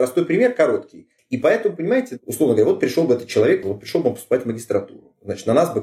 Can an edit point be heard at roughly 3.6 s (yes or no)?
yes